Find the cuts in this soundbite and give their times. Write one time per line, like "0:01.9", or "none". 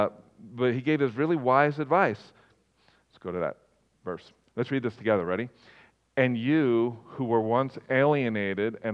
0:02.5